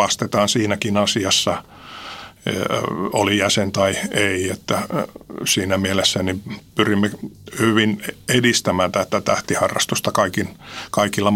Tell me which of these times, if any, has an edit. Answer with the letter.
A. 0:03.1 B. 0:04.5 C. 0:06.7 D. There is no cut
C